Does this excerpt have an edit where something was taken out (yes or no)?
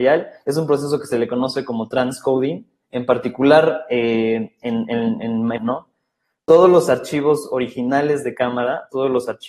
yes